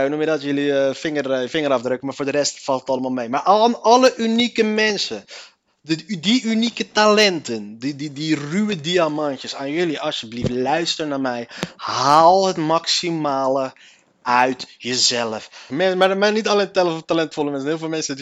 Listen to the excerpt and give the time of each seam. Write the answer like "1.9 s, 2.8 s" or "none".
15.7 s